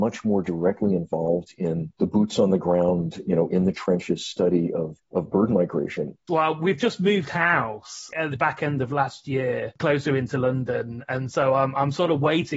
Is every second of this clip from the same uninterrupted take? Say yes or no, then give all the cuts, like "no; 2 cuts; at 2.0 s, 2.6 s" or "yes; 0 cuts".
no; 1 cut; at 6.3 s